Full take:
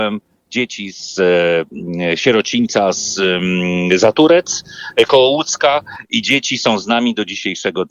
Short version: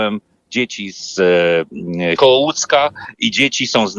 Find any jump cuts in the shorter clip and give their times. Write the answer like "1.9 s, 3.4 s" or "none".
2.2 s